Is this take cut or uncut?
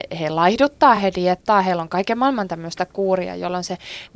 uncut